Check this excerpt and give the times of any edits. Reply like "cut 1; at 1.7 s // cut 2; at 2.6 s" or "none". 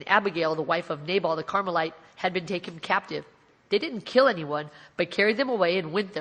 cut 1; at 3.5 s